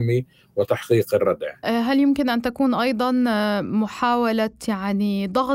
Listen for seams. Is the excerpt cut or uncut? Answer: cut